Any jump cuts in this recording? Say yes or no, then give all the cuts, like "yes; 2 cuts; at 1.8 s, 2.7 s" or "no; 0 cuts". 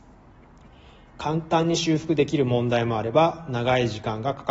no; 0 cuts